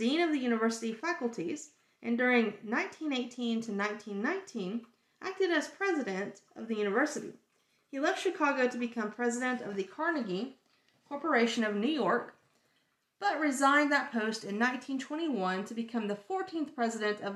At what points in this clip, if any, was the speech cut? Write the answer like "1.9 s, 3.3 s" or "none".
none